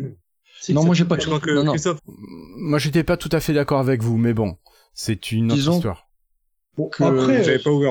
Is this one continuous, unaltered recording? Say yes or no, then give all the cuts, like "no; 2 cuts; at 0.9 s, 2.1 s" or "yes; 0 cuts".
no; 1 cut; at 2.0 s